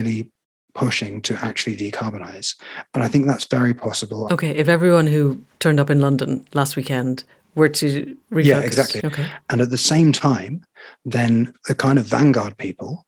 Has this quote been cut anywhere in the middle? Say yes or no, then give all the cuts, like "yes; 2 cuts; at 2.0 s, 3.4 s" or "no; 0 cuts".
yes; 2 cuts; at 4.3 s, 9.0 s